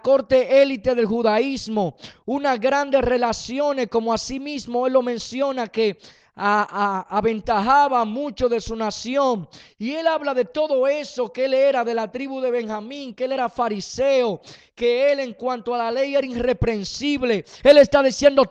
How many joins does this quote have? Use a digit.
1